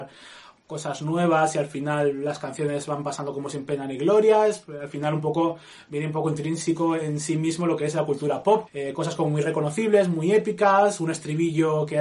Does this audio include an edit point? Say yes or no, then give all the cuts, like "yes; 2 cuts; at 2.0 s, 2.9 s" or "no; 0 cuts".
yes; 1 cut; at 8.7 s